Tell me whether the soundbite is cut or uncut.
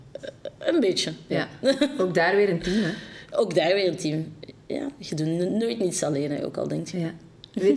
uncut